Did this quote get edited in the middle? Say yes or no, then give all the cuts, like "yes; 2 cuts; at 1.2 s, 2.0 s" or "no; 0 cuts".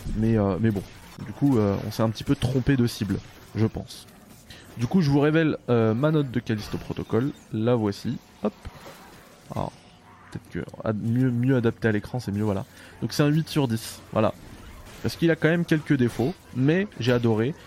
no; 0 cuts